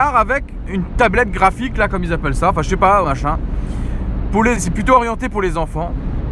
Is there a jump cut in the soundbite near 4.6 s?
yes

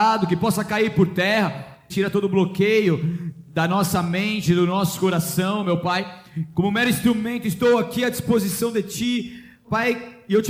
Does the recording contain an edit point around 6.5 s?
yes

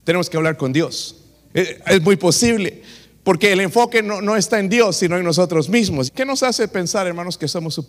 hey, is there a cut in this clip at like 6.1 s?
yes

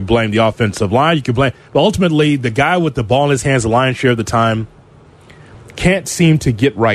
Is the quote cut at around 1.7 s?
no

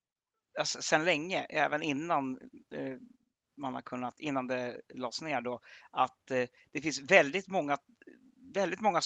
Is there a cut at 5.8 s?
no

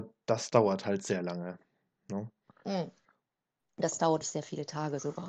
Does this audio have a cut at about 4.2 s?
yes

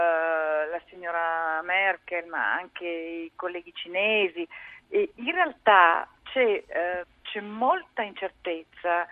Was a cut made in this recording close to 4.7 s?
no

